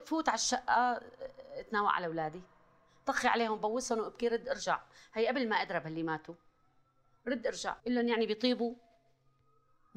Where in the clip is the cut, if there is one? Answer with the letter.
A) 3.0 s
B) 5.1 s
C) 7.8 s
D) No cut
C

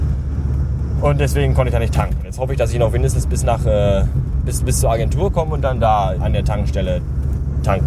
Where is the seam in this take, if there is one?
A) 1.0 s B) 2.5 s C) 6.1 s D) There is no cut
C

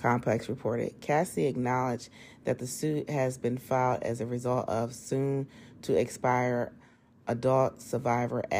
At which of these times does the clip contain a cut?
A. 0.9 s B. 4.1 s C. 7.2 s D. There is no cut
D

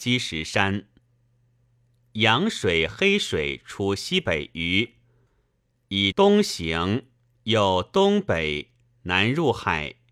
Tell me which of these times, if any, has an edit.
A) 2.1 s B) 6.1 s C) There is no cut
B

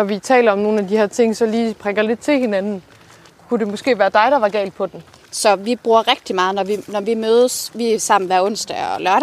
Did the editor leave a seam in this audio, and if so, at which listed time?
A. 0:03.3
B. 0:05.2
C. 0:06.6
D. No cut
B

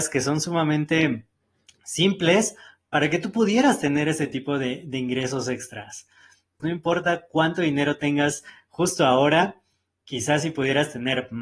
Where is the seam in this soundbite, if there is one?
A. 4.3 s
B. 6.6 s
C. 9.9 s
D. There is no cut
B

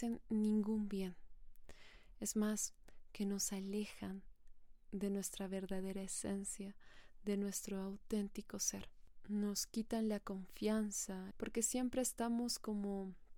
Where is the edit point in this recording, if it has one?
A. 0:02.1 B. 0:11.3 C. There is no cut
B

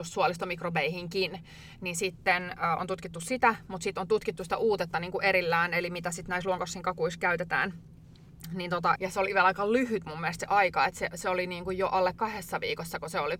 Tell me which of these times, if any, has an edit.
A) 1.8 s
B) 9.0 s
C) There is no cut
B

